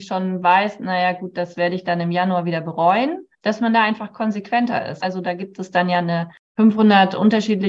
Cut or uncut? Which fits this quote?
cut